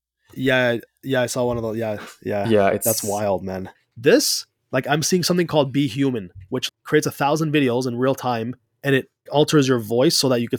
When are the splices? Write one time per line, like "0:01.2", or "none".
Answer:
0:03.7
0:06.7
0:09.3